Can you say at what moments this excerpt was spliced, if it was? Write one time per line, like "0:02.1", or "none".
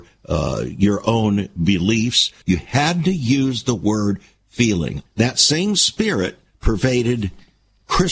0:02.4
0:05.1